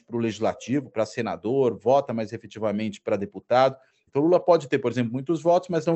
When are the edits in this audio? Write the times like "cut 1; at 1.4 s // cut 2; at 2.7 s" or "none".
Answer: cut 1; at 4.1 s